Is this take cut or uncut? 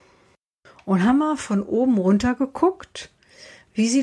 uncut